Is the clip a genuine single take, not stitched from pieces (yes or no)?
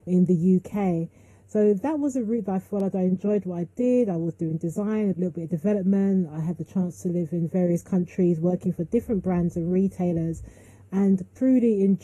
yes